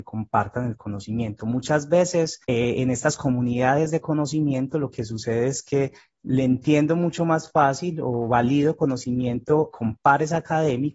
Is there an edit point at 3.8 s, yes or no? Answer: no